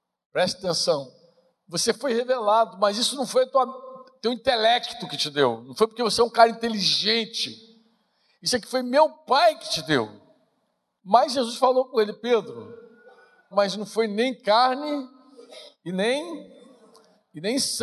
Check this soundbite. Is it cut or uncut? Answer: cut